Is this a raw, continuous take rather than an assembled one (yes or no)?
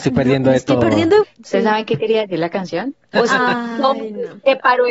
no